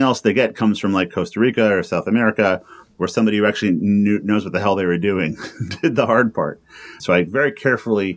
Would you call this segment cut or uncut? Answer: cut